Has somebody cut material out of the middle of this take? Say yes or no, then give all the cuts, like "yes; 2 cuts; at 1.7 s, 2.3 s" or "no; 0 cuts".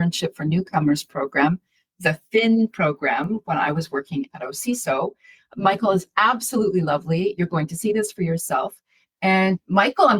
no; 0 cuts